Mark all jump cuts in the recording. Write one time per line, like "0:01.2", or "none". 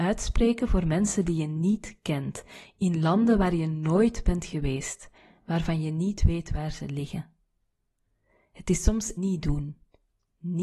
0:09.2

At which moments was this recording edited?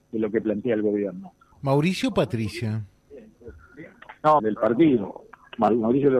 0:01.5
0:04.4

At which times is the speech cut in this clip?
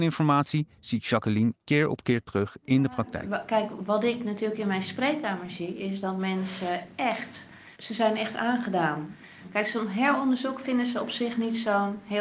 0:07.7

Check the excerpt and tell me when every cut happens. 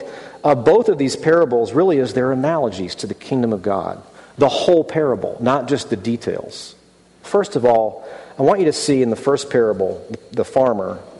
0:07.2

